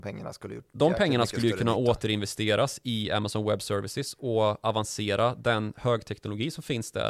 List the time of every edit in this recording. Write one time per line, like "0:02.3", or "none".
none